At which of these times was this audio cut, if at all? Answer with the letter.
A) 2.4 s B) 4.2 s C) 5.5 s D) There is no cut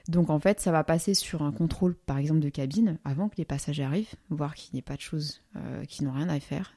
D